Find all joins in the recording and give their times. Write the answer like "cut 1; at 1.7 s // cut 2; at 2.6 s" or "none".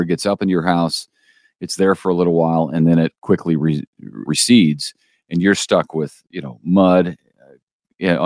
cut 1; at 4.3 s